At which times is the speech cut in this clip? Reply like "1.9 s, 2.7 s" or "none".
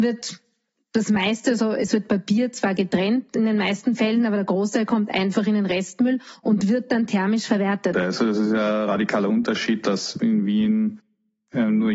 7.9 s